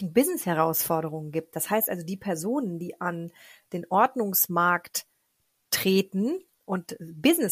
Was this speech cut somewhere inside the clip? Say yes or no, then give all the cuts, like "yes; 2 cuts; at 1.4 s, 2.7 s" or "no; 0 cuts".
no; 0 cuts